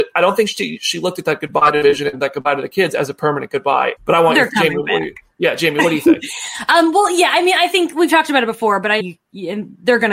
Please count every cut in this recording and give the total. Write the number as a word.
two